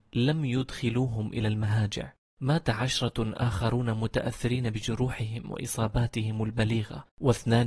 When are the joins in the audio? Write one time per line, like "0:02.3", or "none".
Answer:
0:02.3

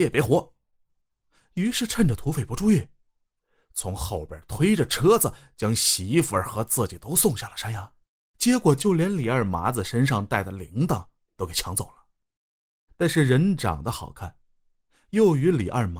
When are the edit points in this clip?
0:08.2
0:12.9

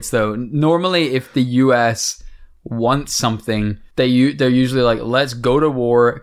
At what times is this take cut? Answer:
none

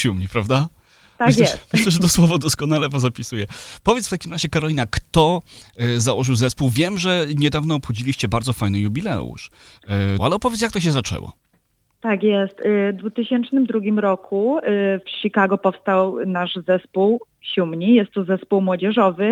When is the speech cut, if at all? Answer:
0:10.2

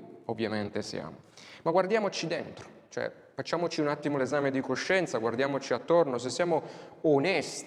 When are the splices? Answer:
none

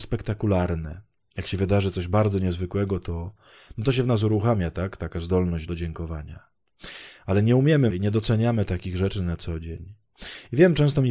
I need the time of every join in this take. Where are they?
0:05.7
0:07.9

